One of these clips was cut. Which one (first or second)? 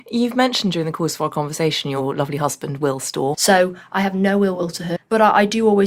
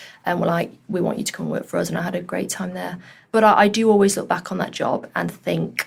first